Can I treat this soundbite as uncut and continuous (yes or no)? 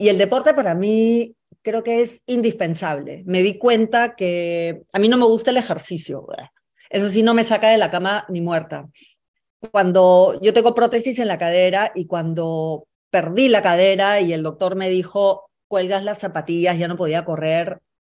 yes